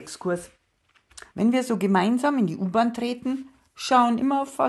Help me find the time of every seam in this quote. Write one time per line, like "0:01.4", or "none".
0:01.3